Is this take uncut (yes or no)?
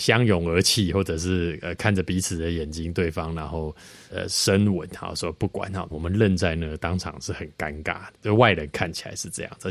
no